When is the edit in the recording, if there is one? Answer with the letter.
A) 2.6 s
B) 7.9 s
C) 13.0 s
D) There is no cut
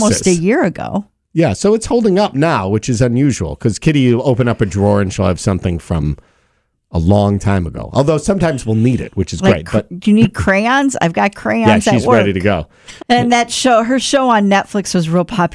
C